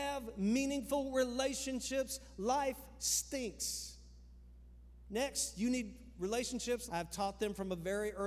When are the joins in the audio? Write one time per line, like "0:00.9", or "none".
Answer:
0:05.1
0:06.9